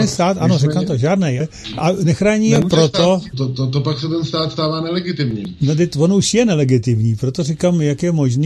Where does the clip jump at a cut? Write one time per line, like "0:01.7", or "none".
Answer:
0:01.4
0:03.3